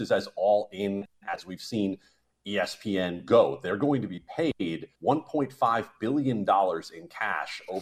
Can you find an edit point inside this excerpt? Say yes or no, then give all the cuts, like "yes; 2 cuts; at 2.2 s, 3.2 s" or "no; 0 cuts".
yes; 1 cut; at 4.9 s